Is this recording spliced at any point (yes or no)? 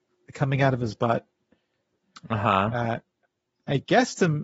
no